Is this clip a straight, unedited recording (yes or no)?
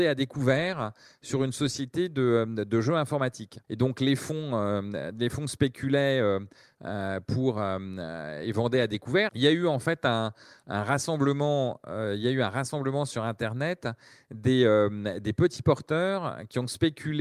no